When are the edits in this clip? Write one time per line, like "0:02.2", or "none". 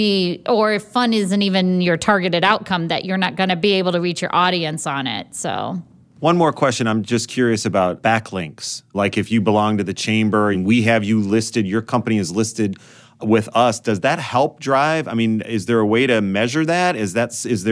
0:10.5